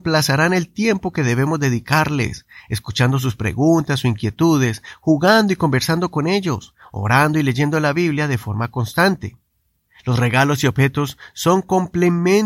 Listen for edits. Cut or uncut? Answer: cut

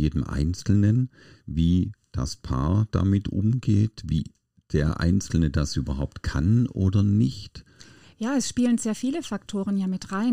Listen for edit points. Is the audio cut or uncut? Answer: uncut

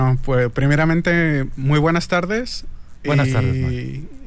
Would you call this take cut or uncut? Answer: uncut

